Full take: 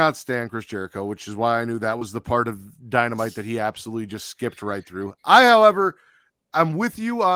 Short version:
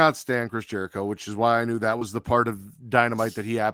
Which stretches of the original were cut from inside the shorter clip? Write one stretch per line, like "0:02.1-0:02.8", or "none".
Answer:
none